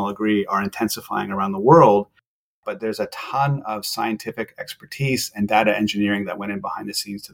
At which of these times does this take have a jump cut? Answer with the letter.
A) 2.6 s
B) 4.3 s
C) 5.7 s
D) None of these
A